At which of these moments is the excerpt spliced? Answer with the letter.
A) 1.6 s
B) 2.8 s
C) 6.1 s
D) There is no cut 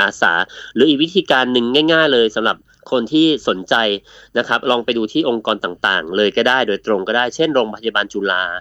D